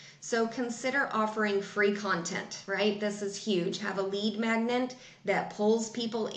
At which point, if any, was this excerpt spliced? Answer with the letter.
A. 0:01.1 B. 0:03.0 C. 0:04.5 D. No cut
D